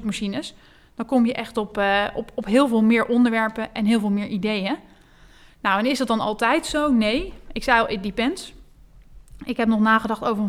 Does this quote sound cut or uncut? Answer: uncut